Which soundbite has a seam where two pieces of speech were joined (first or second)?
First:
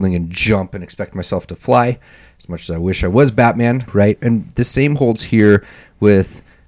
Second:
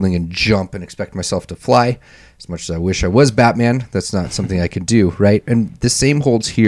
first